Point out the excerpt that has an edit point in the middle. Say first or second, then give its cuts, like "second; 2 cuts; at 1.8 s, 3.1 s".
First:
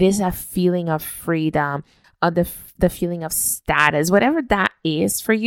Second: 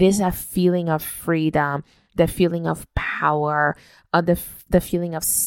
first; 1 cut; at 2.0 s